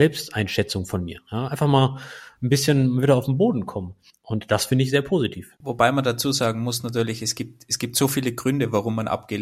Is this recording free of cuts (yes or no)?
yes